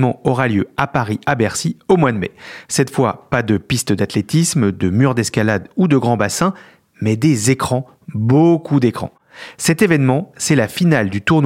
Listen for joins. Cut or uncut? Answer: uncut